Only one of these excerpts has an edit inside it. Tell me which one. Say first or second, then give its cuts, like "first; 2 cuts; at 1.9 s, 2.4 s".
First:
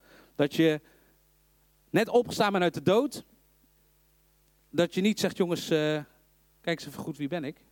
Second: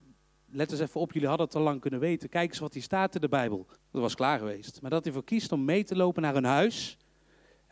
second; 1 cut; at 3.7 s